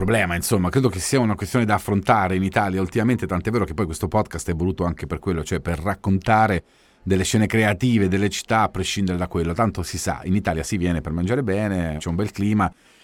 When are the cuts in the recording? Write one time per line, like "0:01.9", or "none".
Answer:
none